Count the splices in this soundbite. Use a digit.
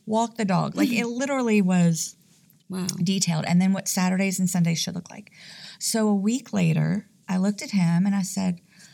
1